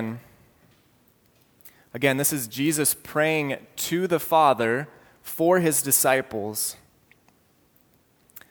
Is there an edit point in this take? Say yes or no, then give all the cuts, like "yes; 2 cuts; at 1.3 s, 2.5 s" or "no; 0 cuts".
no; 0 cuts